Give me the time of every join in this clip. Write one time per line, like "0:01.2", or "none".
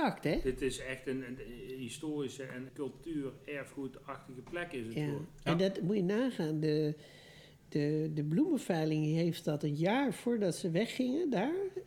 0:02.7